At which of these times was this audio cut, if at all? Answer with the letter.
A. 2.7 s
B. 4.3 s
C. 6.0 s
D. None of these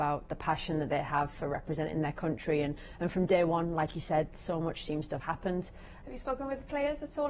C